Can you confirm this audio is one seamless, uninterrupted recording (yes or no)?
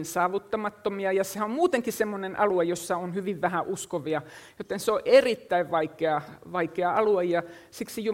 yes